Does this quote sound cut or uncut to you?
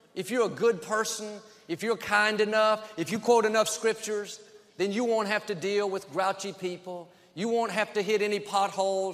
uncut